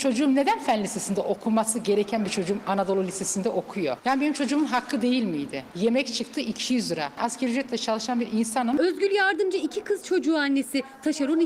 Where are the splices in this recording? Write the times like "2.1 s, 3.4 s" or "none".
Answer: 5.7 s